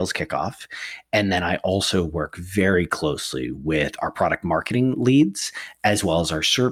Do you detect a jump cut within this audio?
no; 0 cuts

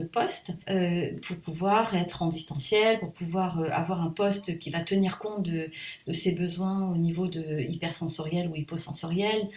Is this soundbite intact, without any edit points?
yes; 0 cuts

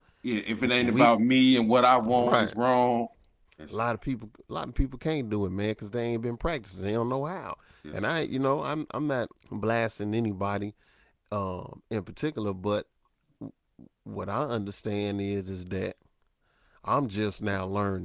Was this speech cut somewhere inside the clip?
yes; 2 cuts; at 3.4 s, 9.4 s

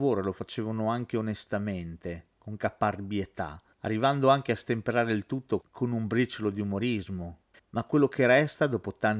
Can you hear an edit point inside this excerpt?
yes; 1 cut; at 7.5 s

